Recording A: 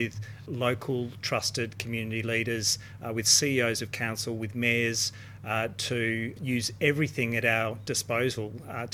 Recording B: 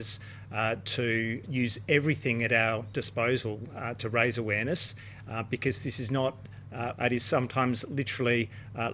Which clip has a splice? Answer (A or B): B